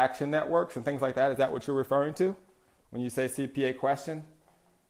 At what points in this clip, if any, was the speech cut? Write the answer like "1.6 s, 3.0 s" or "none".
none